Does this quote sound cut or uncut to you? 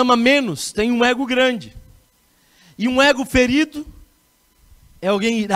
uncut